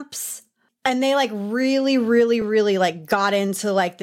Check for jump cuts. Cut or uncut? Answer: uncut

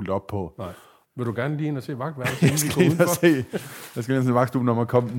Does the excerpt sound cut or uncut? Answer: cut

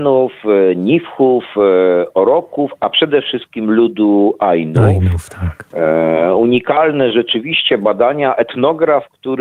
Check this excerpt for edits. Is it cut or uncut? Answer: uncut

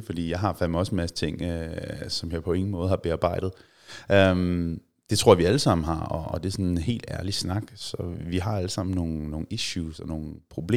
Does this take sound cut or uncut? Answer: uncut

